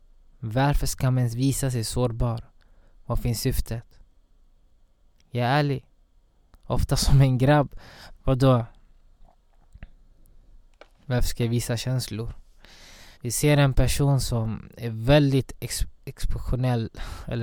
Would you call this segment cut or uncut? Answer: cut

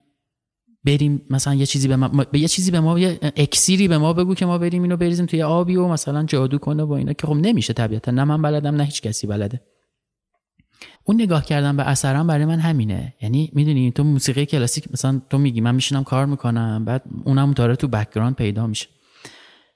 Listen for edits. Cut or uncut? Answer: cut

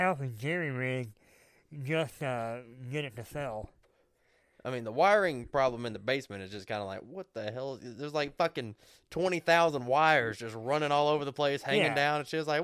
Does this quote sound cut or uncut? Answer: uncut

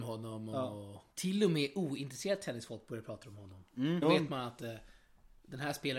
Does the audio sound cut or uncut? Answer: cut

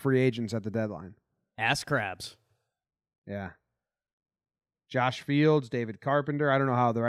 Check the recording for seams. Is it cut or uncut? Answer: uncut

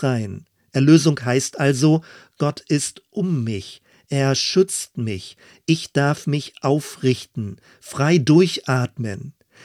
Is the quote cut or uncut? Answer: uncut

